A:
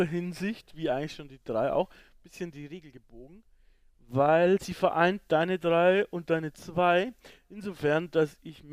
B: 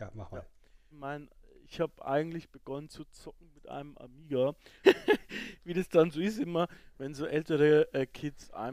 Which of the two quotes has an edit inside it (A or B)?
B